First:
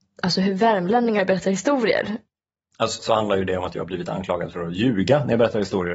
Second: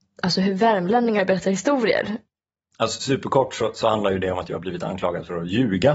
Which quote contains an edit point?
first; 1 cut; at 3.0 s

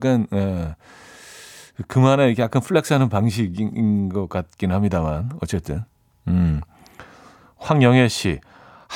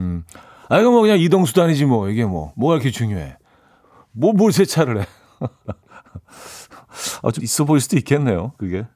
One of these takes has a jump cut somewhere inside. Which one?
second; 1 cut; at 7.4 s

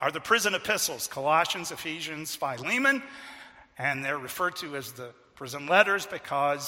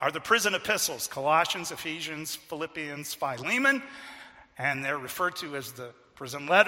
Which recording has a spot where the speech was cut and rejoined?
first; 1 cut; at 2.4 s

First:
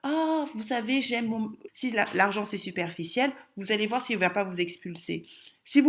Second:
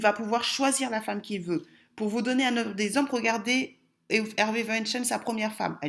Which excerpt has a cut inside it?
first; 1 cut; at 1.7 s

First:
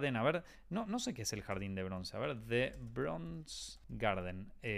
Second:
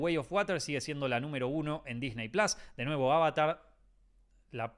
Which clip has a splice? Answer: first; 1 cut; at 3.8 s

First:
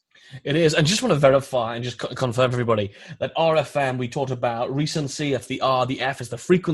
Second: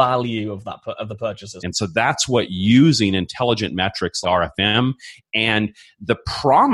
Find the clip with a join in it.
second; 2 cuts; at 1.6 s, 4.2 s

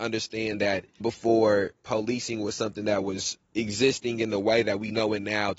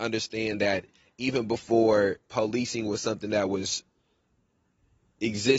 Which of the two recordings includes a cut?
first; 2 cuts; at 1.0 s, 3.4 s

